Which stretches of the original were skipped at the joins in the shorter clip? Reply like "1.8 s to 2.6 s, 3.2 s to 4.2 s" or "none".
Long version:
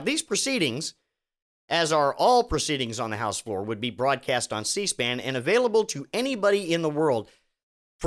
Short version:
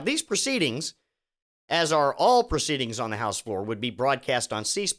none

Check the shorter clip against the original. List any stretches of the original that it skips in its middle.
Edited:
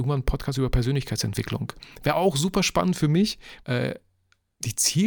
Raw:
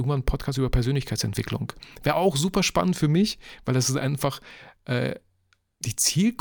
3.6 s to 4.8 s

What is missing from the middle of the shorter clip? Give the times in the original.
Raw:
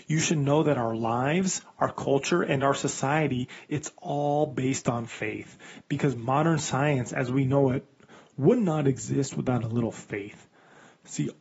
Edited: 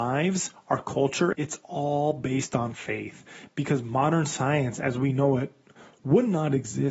2.4 s to 3.7 s

